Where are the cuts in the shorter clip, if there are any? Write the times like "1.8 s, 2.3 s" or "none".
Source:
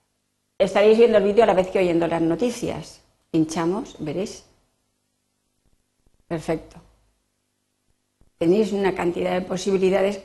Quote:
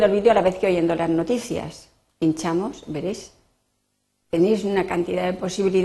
4.2 s